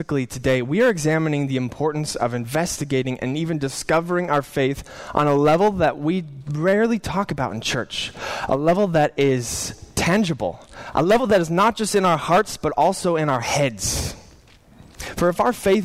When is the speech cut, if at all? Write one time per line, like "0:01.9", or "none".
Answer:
0:10.9